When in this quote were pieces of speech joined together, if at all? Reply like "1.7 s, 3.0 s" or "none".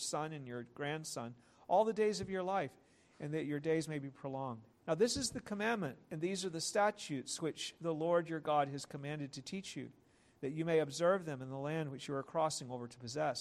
4.8 s